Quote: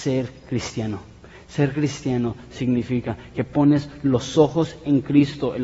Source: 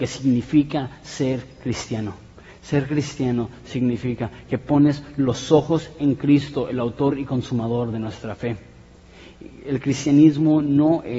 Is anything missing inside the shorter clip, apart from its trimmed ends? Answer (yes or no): no